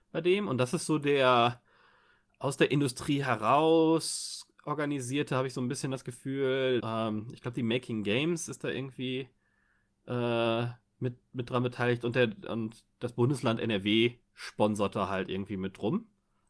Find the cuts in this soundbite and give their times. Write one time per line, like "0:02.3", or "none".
0:06.8
0:14.2